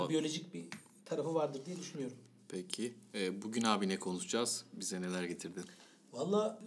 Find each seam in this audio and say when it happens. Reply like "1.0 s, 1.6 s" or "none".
none